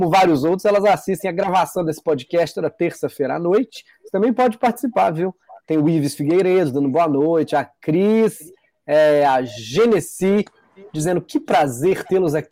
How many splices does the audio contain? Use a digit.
0